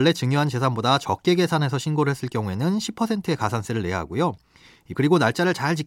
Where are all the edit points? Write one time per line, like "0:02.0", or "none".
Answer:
0:04.9